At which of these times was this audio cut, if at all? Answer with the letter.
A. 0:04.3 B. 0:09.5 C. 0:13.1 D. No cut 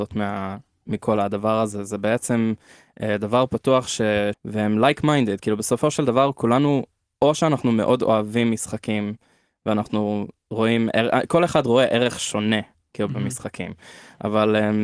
A